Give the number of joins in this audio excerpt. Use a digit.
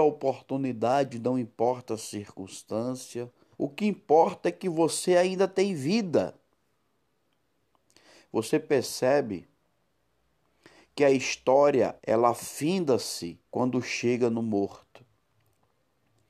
3